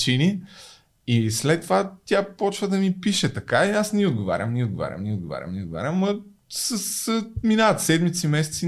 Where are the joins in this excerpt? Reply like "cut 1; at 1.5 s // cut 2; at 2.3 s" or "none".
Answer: none